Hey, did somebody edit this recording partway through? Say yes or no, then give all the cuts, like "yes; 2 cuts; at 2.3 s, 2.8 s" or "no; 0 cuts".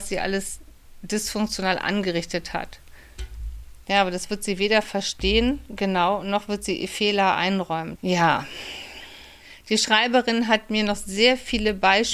yes; 1 cut; at 7.9 s